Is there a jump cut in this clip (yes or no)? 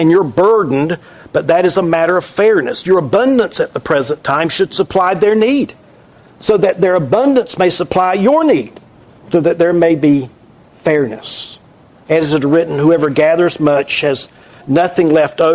no